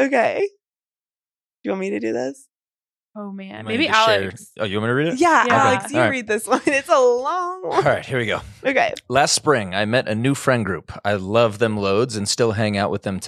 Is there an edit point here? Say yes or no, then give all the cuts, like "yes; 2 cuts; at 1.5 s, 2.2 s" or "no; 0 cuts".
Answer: no; 0 cuts